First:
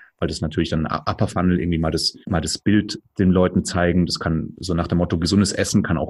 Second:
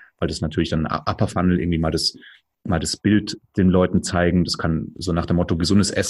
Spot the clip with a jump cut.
first; 1 cut; at 2.2 s

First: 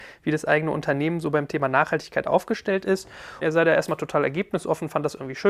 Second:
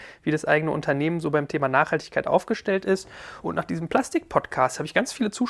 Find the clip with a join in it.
first; 1 cut; at 3.4 s

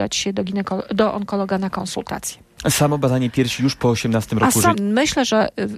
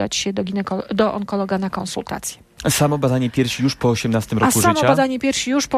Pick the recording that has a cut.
first; 1 cut; at 4.7 s

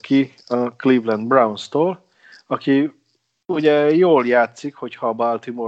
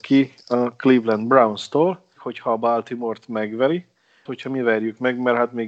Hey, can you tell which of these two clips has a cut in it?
second; 2 cuts; at 2.2 s, 4.3 s

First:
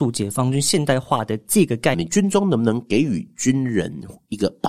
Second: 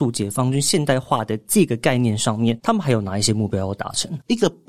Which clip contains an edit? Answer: first; 1 cut; at 1.9 s

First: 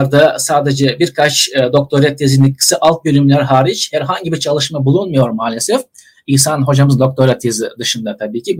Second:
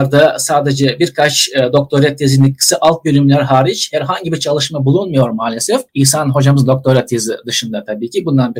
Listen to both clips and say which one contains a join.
second; 1 cut; at 5.9 s

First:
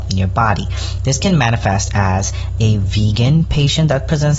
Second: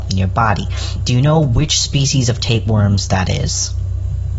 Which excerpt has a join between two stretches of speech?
second; 1 cut; at 1.0 s

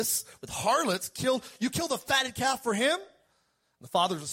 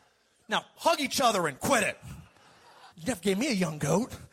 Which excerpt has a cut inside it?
second; 1 cut; at 2.9 s

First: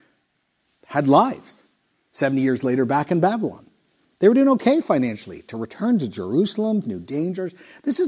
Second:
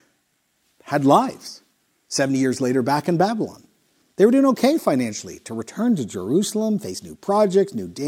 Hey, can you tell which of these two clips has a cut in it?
first; 1 cut; at 6.8 s

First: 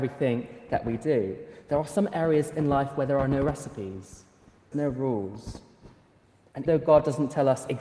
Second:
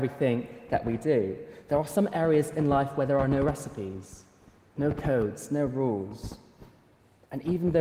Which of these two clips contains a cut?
first; 2 cuts; at 4.7 s, 6.7 s

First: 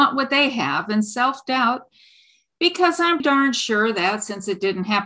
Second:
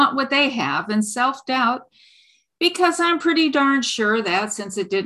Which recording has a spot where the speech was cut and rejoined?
first; 1 cut; at 3.2 s

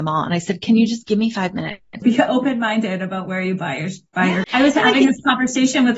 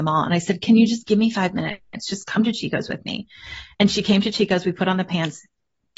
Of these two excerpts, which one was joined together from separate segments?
first; 2 cuts; at 2.0 s, 4.4 s

